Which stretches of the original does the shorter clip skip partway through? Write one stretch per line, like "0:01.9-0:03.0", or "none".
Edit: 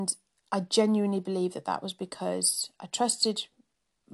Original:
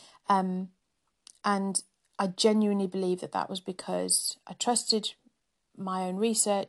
none